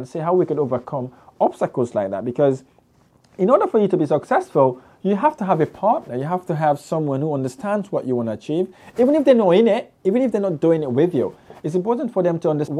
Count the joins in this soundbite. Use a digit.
0